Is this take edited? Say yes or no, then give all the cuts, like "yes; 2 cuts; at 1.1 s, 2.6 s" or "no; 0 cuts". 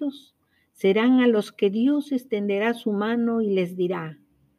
no; 0 cuts